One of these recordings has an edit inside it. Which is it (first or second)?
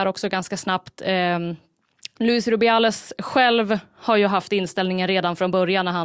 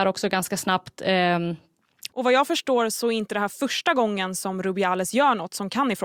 second